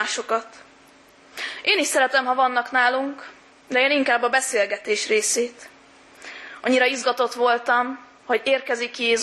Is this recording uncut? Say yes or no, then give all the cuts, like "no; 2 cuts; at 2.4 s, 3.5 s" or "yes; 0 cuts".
yes; 0 cuts